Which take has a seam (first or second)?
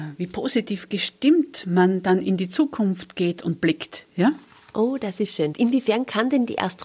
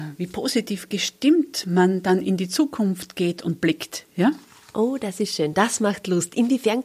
first